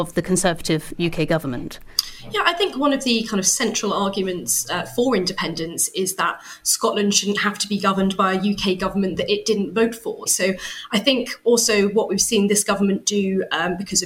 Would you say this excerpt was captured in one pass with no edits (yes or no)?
no